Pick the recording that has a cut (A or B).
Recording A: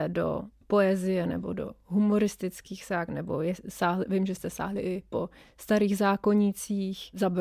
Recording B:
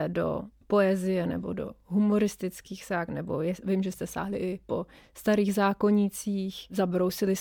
B